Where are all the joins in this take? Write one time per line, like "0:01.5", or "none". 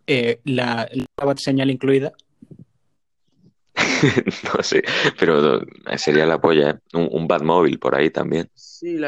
0:01.1